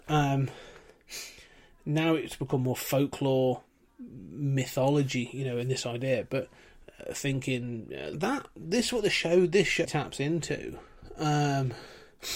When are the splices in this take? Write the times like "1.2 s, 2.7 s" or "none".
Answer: 8.1 s, 9.8 s